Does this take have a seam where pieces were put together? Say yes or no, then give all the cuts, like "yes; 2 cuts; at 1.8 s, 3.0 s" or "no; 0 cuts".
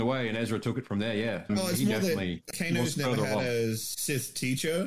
yes; 2 cuts; at 1.5 s, 2.5 s